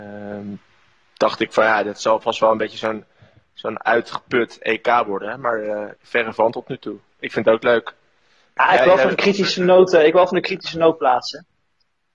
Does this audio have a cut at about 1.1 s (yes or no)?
no